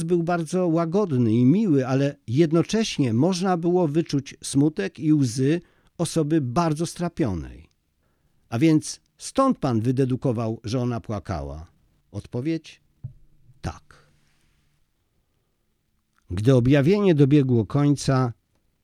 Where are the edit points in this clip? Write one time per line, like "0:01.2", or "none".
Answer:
none

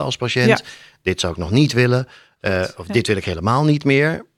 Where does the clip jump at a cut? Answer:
none

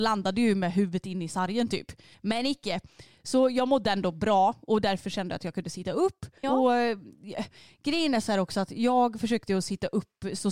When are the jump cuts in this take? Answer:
0:02.1
0:06.4

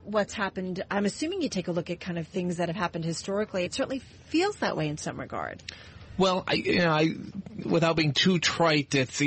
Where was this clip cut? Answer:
0:03.7

